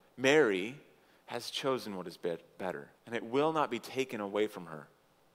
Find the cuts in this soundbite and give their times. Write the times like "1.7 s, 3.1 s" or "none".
3.0 s

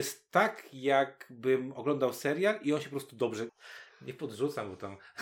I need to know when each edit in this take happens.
3.5 s

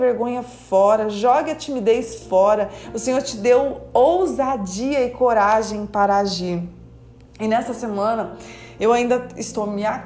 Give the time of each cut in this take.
none

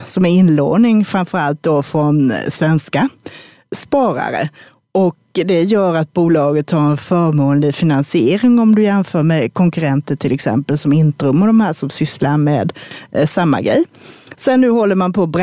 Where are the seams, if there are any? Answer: none

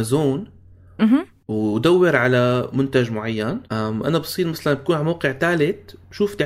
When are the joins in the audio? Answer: 3.7 s

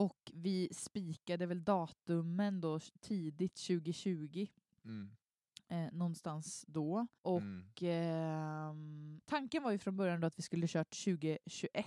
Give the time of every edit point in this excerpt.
7.2 s, 9.2 s

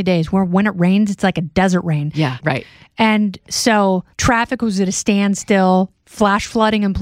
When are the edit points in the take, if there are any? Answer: 2.4 s, 4.1 s

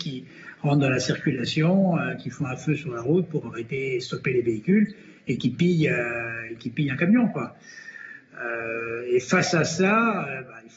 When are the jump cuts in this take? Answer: none

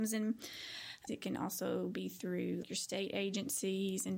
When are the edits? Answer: 1.1 s, 2.6 s

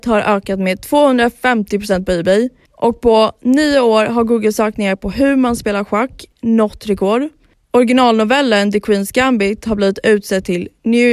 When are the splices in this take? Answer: none

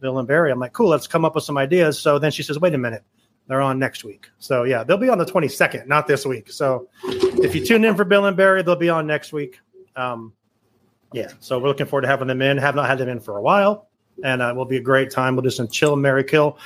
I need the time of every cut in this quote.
none

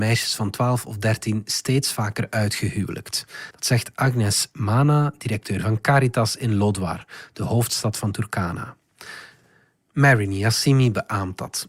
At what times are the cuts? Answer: 3.5 s

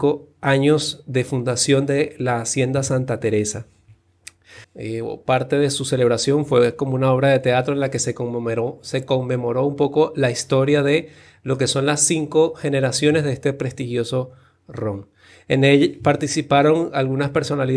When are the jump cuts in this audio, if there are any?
4.6 s

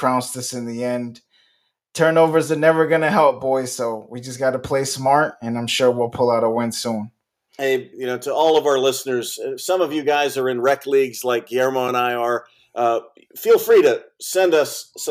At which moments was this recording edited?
7.9 s

